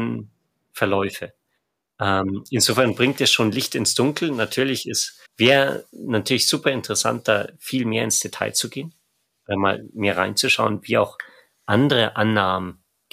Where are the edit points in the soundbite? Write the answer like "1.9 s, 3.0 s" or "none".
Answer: 5.3 s